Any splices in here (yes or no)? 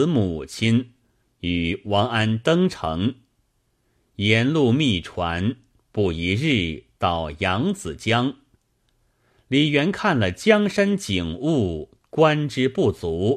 no